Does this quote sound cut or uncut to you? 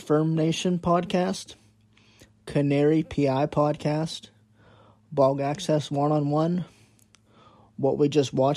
uncut